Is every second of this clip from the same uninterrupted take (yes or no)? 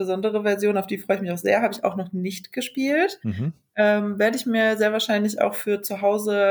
yes